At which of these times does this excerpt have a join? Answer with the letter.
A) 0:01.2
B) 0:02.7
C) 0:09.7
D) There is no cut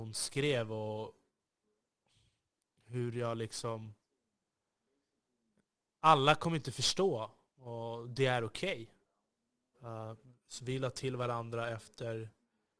C